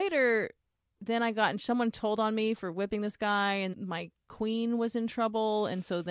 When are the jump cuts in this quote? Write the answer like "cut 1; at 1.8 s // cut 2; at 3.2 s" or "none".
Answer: cut 1; at 3.7 s